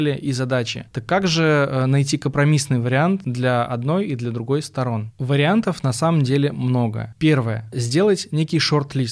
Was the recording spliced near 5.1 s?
no; 0 cuts

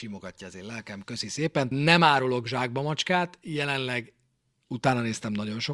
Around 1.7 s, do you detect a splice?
yes; 1 cut; at 1.7 s

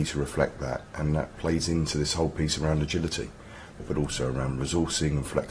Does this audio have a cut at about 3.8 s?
yes; 1 cut; at 3.8 s

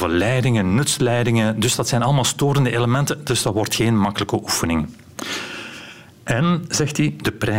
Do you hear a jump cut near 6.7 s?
no; 0 cuts

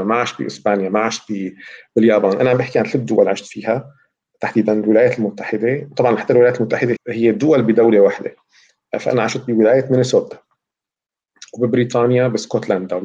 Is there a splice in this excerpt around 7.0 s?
yes; 1 cut; at 7.0 s

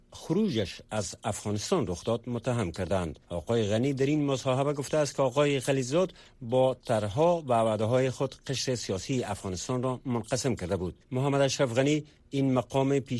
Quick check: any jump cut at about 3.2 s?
yes; 2 cuts; at 3.2 s, 11.0 s

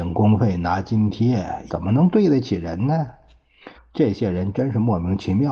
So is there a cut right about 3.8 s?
yes; 2 cuts; at 1.7 s, 3.8 s

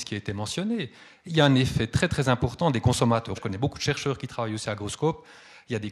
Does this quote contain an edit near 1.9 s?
no; 1 cut; at 3.3 s

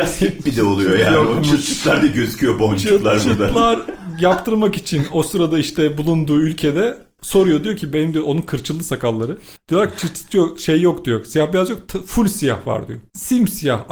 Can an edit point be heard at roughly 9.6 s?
yes; 1 cut; at 9.6 s

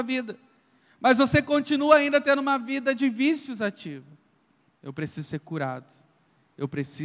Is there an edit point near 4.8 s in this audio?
yes; 1 cut; at 4.8 s

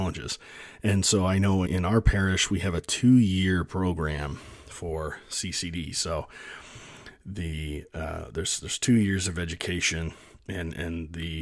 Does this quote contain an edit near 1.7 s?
yes; 1 cut; at 1.7 s

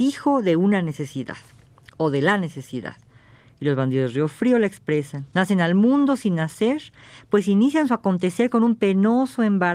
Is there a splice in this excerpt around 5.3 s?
yes; 1 cut; at 5.3 s

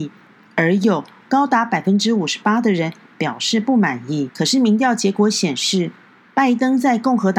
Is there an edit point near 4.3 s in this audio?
yes; 1 cut; at 4.3 s

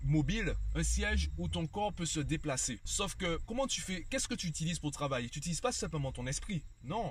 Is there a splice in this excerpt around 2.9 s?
yes; 1 cut; at 2.9 s

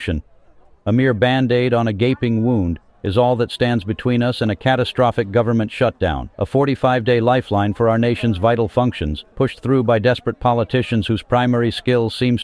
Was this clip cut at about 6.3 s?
yes; 2 cuts; at 6.3 s, 9.3 s

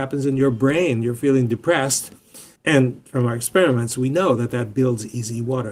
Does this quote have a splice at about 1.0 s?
no; 1 cut; at 2.6 s

